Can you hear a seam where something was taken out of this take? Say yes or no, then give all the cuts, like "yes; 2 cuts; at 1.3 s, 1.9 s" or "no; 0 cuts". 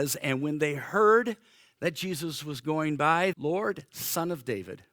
yes; 1 cut; at 3.3 s